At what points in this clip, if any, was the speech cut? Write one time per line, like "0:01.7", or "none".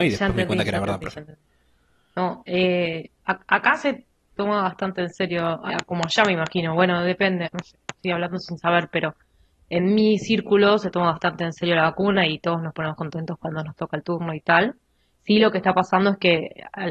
0:05.7
0:07.5